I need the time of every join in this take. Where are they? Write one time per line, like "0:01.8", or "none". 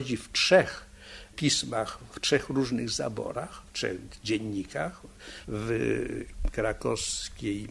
0:05.4